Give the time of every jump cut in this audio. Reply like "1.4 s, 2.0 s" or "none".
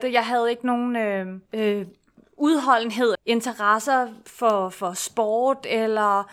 1.5 s, 3.1 s